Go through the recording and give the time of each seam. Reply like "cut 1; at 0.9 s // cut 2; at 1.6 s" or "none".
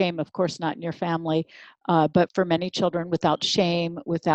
cut 1; at 2.3 s